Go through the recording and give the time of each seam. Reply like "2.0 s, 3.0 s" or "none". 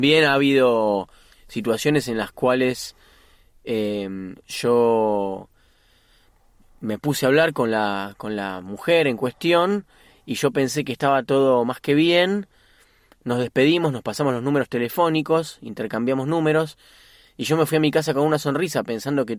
none